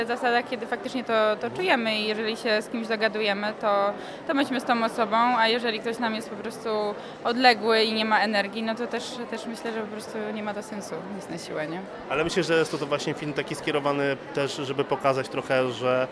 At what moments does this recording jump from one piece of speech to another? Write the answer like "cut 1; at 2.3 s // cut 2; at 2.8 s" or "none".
cut 1; at 12.0 s